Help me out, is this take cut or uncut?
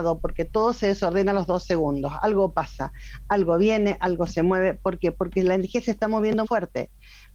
cut